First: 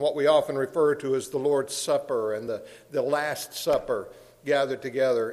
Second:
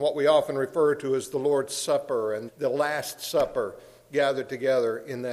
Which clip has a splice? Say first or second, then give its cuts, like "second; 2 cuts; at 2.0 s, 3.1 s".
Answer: second; 1 cut; at 2.5 s